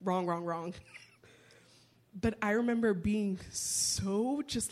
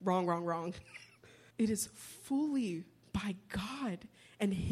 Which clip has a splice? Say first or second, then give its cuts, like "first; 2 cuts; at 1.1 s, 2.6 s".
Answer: second; 1 cut; at 1.5 s